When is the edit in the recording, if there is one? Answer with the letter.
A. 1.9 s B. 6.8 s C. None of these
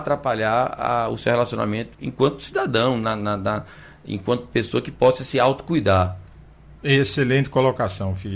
A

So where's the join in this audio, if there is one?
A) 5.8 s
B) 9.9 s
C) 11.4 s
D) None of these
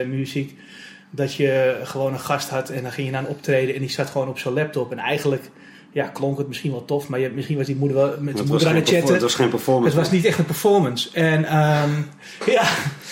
D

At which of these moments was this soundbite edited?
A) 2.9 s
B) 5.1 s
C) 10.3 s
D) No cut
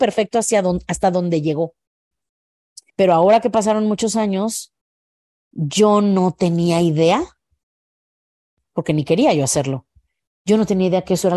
A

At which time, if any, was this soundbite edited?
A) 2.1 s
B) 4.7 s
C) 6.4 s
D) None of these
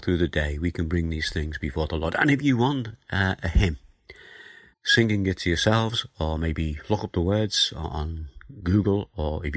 B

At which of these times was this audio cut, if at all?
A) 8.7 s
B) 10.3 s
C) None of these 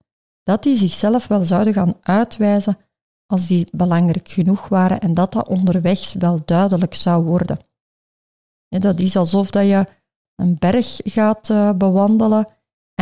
B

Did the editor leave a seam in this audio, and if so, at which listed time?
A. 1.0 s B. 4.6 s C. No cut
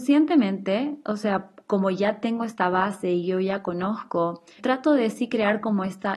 B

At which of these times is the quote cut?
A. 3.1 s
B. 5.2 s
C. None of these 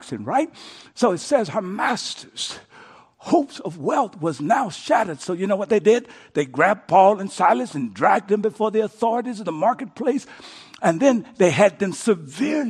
C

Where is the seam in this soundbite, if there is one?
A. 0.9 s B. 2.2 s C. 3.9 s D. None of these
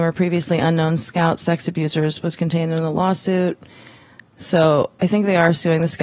D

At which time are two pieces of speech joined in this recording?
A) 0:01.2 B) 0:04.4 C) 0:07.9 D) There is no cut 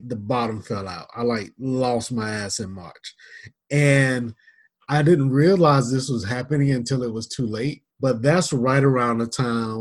C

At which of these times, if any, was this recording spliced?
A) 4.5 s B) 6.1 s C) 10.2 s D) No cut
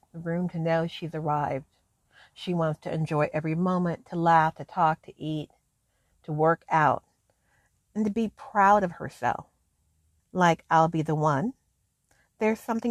C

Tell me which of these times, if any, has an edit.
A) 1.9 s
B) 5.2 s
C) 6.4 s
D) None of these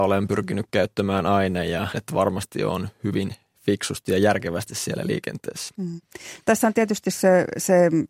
A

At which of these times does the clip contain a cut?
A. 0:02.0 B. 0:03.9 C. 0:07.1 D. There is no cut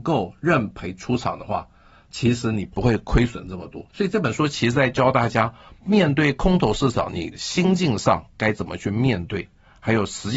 B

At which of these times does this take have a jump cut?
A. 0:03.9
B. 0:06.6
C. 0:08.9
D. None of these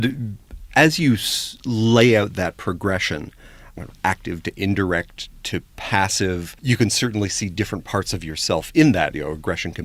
B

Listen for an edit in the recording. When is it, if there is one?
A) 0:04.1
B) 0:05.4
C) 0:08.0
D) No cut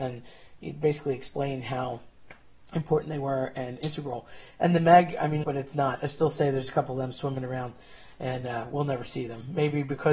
B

